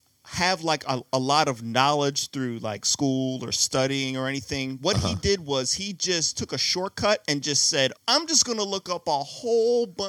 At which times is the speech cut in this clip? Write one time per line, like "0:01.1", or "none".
0:08.0